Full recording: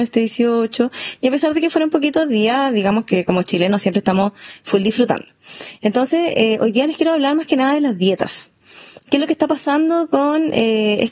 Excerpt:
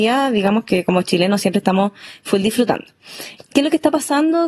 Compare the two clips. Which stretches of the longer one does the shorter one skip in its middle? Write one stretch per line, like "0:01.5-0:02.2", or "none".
0:05.8-0:08.9